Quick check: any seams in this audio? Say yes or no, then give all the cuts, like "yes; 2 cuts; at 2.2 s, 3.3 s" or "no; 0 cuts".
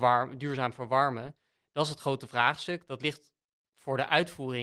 no; 0 cuts